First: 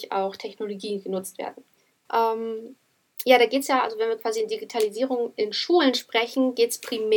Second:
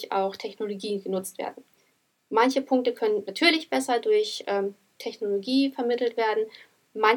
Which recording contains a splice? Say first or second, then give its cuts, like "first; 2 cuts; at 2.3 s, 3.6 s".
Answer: first; 1 cut; at 2.1 s